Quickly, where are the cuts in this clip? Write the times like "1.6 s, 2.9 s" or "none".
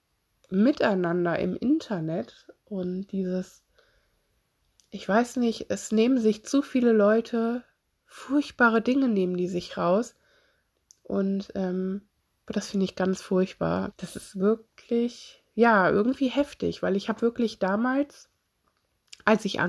13.9 s